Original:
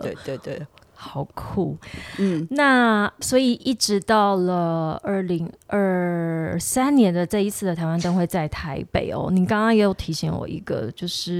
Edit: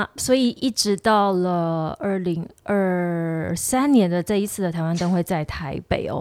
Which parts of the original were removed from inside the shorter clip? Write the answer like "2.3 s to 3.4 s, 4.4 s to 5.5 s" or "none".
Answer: none